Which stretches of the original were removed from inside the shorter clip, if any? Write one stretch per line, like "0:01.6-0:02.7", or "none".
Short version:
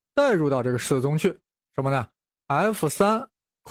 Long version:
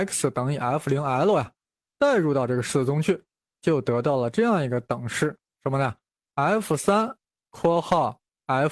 0:03.5-0:05.5